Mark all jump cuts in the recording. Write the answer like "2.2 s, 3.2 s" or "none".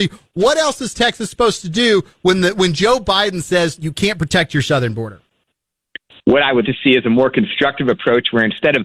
3.8 s, 6.6 s